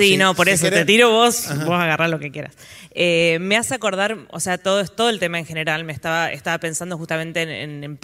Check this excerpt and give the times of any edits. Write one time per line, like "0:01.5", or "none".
none